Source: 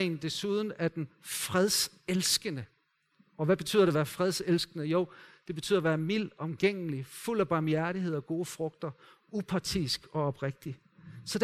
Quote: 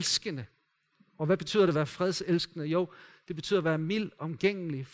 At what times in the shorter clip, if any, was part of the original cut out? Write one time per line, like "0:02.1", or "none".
none

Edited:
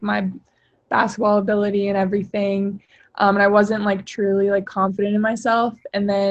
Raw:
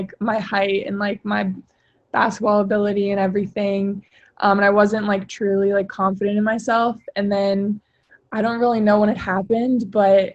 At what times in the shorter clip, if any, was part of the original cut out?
none

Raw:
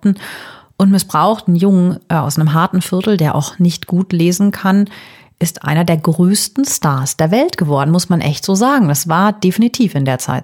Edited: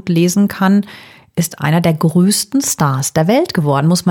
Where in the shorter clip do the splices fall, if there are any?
none

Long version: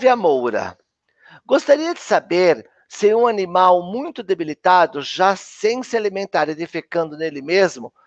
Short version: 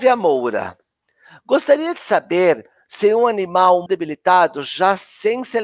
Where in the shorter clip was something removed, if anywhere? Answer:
0:03.9

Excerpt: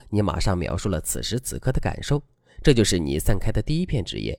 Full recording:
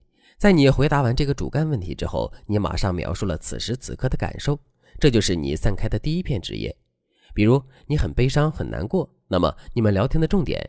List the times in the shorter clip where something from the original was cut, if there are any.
none

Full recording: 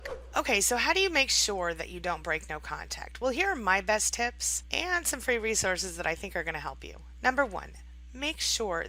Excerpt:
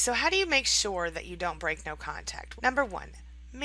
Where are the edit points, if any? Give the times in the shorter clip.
0:02.6

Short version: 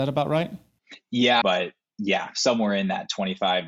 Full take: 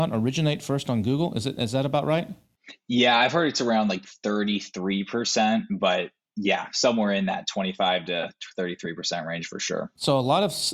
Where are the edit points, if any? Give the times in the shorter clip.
0:01.4

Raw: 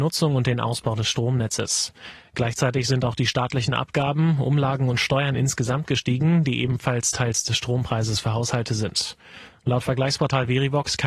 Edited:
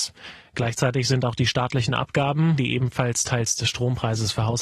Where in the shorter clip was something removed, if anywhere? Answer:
0:02.6

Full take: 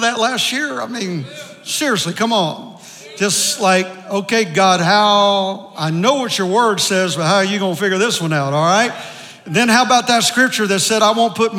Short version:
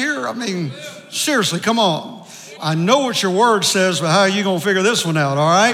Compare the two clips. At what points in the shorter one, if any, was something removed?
0:02.6

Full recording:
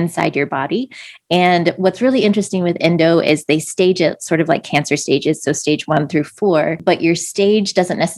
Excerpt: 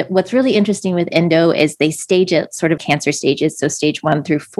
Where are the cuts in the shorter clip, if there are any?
0:02.8

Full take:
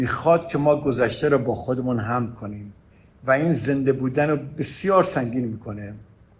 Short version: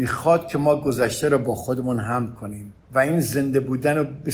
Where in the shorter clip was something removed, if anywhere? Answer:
0:02.8

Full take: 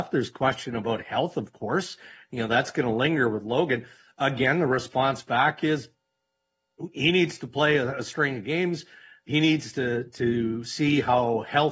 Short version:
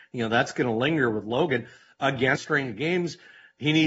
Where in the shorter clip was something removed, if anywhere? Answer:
0:02.4

